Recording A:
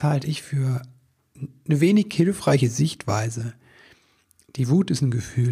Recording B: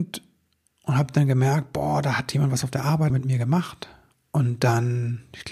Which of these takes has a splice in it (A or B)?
B